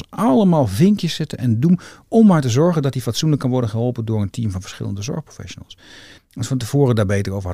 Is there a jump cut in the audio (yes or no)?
yes